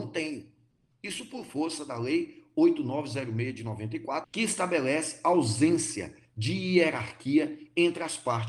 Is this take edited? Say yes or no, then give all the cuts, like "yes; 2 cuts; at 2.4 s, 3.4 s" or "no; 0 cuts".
yes; 2 cuts; at 0.9 s, 4.2 s